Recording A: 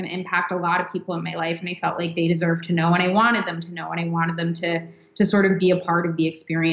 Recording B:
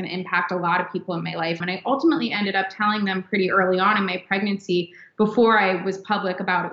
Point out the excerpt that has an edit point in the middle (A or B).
B